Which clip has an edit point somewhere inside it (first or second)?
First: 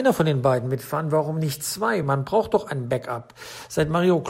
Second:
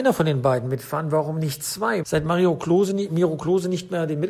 second